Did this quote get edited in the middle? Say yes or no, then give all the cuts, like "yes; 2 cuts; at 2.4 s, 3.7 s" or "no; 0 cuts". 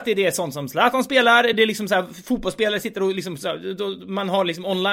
no; 0 cuts